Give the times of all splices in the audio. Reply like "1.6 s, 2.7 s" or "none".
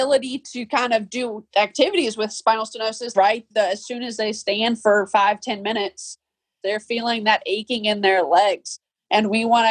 3.1 s, 6.6 s